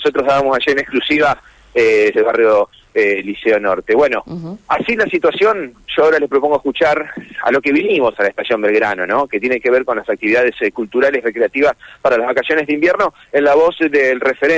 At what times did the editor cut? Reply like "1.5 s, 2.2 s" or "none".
2.1 s